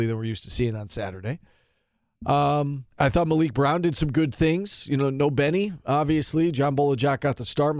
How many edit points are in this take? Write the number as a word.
one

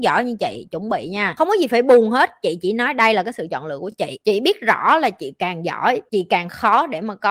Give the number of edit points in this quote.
zero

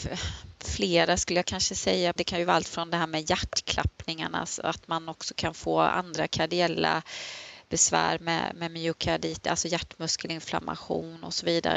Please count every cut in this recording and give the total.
one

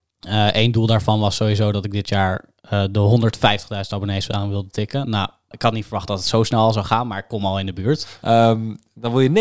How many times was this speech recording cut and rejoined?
two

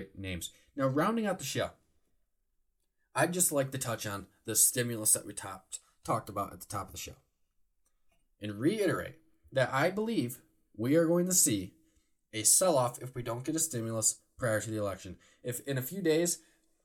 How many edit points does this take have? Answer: zero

